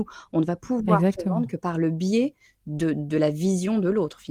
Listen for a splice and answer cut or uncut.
uncut